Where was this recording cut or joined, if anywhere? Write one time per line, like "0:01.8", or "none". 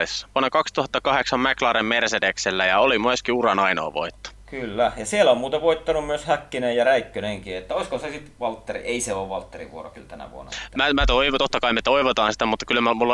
none